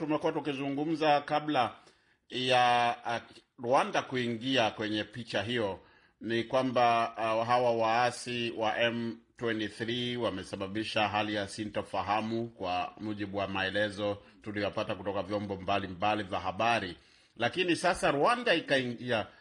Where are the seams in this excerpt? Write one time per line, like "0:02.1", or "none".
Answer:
none